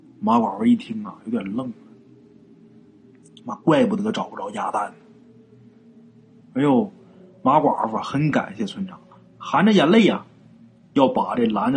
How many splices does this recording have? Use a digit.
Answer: 1